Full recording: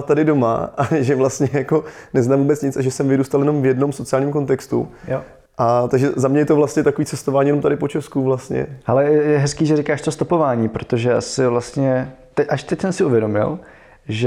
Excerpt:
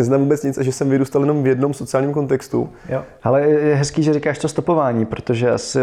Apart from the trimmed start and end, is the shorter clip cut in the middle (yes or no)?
yes